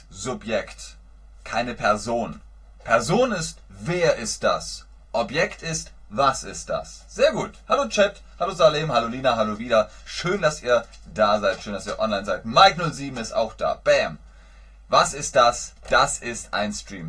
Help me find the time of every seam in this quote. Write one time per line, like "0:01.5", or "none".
none